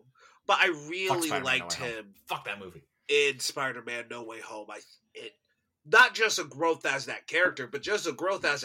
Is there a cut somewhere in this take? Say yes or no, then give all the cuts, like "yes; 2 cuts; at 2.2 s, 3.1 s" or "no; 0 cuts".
no; 0 cuts